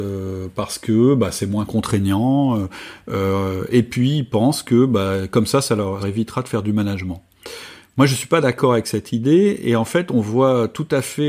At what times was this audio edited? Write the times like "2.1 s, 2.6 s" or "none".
6.0 s